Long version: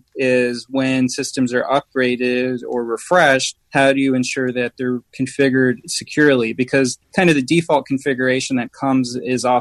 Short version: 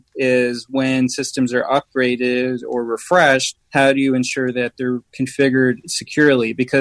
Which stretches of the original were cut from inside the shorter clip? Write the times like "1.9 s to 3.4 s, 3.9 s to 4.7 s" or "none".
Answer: none